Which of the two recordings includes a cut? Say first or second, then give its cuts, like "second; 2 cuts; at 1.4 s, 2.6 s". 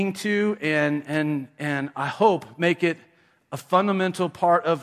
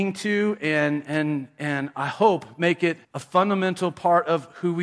second; 1 cut; at 3.0 s